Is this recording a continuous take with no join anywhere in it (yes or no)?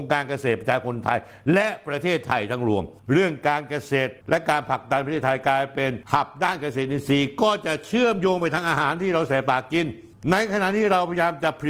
yes